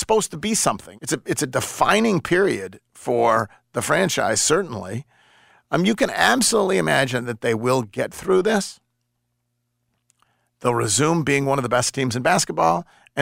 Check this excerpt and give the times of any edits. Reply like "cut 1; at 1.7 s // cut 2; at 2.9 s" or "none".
cut 1; at 1.0 s